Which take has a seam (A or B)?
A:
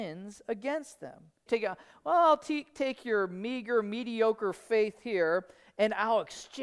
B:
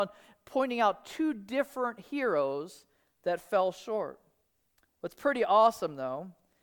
A